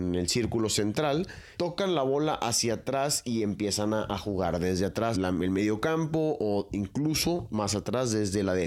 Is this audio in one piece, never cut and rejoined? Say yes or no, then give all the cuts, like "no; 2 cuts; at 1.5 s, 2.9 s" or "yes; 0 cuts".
no; 2 cuts; at 1.5 s, 5.1 s